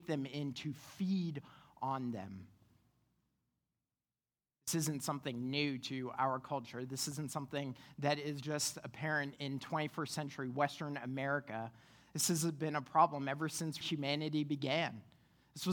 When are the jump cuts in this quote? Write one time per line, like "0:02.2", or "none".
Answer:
0:13.8